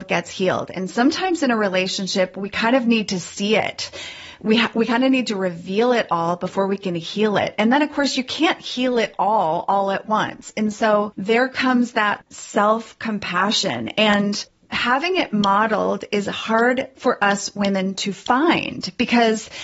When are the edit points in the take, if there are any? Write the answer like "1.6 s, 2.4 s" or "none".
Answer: none